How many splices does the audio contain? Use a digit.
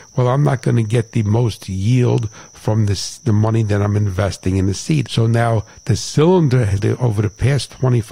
2